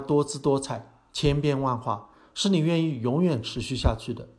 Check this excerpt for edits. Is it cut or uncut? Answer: uncut